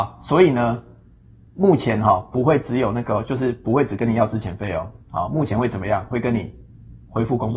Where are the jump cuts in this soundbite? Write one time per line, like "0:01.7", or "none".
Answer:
none